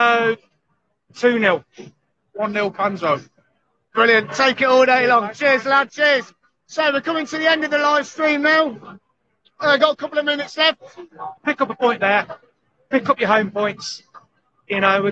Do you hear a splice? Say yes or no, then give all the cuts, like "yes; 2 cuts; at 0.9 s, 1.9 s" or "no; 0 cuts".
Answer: yes; 2 cuts; at 5.9 s, 11.4 s